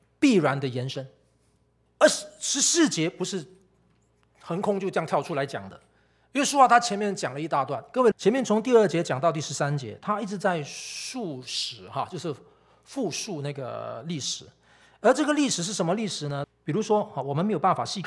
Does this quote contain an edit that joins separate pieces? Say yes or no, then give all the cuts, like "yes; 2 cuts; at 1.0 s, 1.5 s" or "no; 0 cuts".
yes; 3 cuts; at 1.9 s, 8.1 s, 16.4 s